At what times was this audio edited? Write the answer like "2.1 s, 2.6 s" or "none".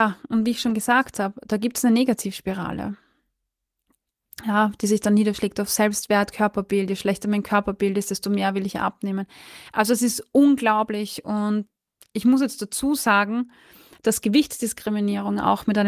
none